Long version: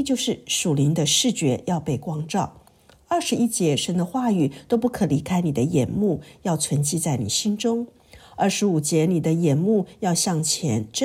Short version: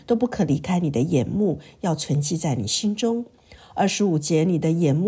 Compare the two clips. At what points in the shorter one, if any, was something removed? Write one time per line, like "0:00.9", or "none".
none